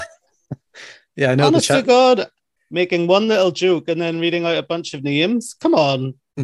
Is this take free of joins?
no; 1 cut; at 2.6 s

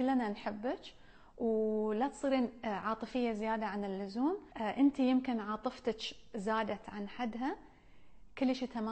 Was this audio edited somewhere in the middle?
yes; 1 cut; at 4.5 s

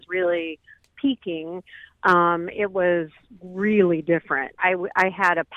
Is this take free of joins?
no; 1 cut; at 4.6 s

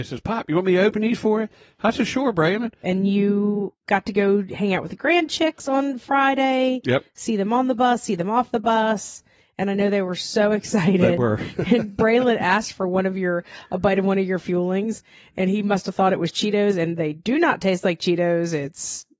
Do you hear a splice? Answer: yes; 1 cut; at 2.8 s

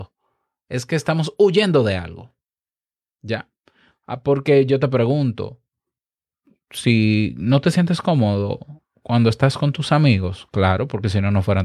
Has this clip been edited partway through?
no; 0 cuts

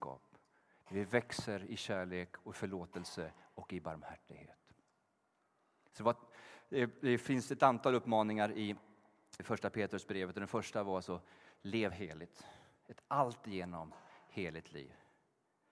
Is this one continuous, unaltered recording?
no; 1 cut; at 9.4 s

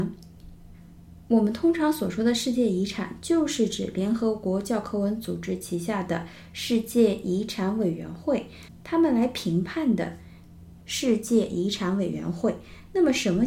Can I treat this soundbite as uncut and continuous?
no; 1 cut; at 10.8 s

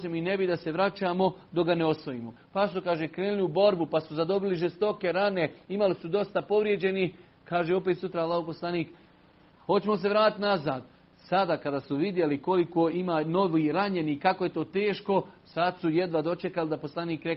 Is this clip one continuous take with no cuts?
no; 1 cut; at 2.4 s

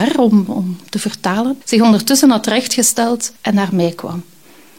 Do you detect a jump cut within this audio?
yes; 2 cuts; at 1.6 s, 3.4 s

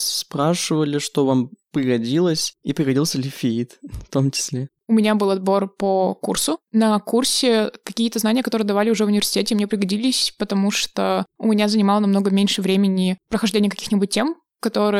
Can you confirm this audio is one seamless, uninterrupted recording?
yes; 0 cuts

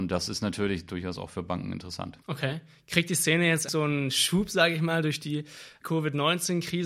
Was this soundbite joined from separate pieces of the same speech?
yes; 3 cuts; at 2.2 s, 3.7 s, 5.8 s

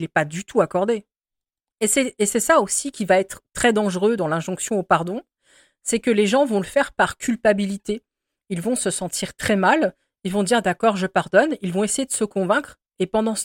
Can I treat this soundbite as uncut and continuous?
yes; 0 cuts

